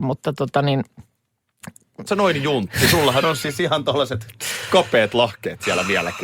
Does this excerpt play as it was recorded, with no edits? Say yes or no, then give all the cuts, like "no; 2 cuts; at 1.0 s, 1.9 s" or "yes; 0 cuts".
no; 1 cut; at 2.1 s